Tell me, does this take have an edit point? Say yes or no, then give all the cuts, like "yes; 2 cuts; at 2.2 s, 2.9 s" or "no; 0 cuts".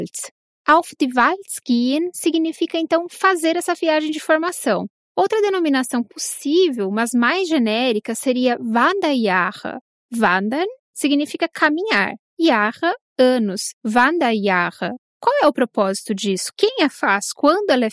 yes; 2 cuts; at 13.7 s, 15.1 s